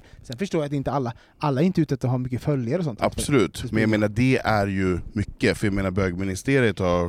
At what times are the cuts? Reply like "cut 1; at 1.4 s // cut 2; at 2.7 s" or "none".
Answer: cut 1; at 3.0 s